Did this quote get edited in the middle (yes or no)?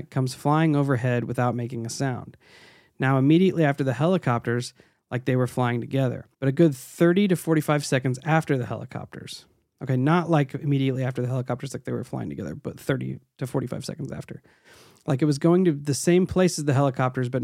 yes